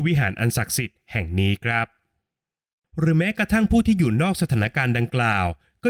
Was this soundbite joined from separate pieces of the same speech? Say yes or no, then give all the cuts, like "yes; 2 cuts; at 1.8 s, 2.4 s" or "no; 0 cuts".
no; 0 cuts